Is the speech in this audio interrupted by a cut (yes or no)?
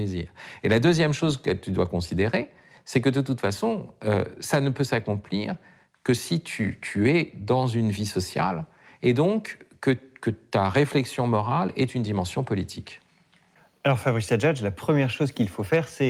no